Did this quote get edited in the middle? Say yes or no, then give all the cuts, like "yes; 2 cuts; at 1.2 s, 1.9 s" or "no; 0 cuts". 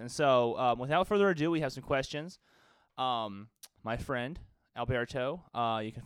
yes; 1 cut; at 3.8 s